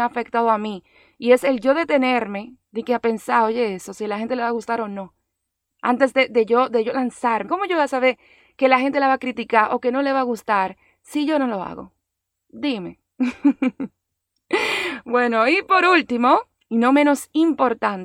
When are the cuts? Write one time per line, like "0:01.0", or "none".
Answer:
0:07.4